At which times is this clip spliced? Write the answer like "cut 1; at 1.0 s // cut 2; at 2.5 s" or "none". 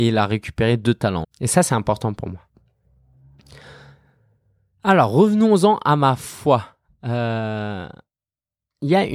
cut 1; at 1.2 s